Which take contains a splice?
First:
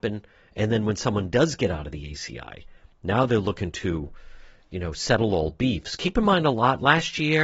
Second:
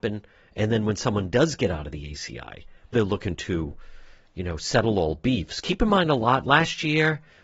second; 1 cut; at 2.9 s

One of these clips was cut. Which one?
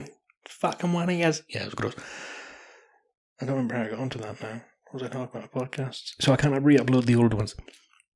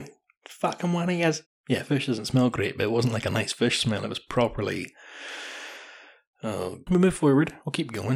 second; 2 cuts; at 1.4 s, 6.9 s

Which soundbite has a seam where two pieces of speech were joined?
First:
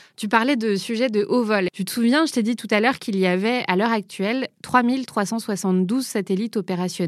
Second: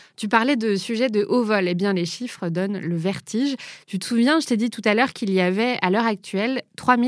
first; 1 cut; at 1.7 s

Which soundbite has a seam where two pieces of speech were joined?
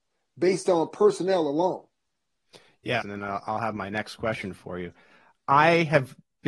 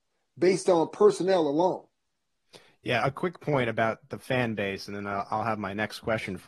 first; 1 cut; at 3.0 s

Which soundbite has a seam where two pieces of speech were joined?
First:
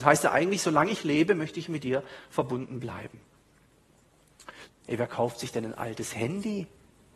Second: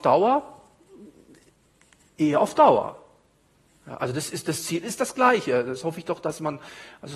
first; 1 cut; at 4.7 s

